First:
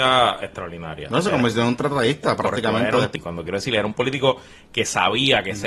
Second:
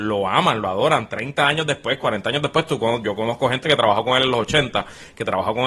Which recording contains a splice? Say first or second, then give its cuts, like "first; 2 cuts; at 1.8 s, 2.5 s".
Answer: first; 1 cut; at 3.2 s